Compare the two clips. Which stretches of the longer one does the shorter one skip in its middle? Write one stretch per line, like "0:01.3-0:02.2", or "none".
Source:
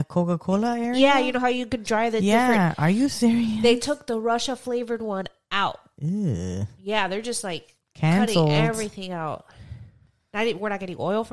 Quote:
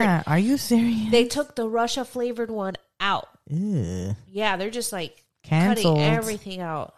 none